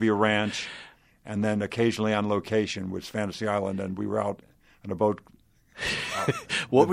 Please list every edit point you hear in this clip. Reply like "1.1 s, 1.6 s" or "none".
none